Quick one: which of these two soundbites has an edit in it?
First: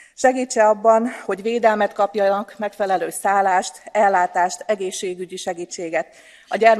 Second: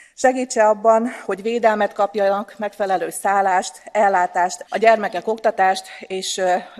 second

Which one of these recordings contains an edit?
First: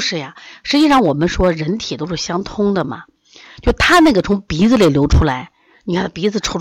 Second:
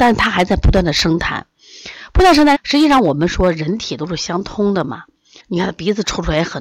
second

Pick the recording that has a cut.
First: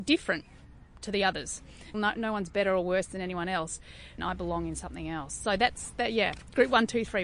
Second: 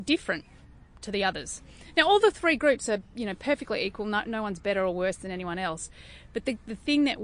first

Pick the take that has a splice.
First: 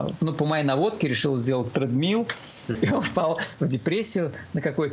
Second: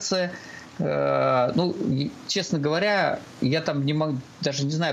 first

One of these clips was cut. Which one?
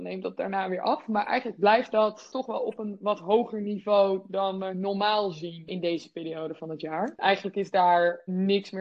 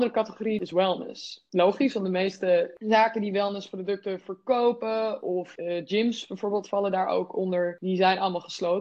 first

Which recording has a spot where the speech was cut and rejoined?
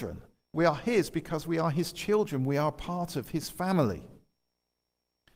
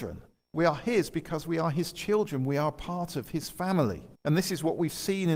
second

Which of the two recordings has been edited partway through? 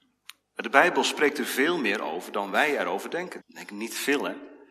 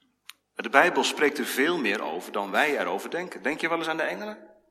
first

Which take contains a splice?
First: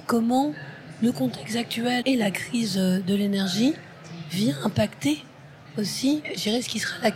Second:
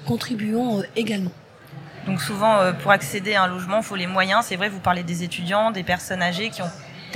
first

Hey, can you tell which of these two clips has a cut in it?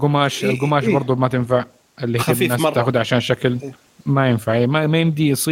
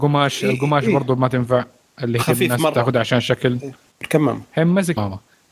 second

